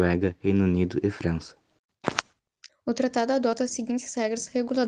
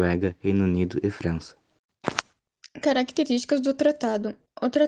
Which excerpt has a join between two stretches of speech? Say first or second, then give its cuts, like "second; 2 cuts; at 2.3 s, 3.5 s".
first; 1 cut; at 2.7 s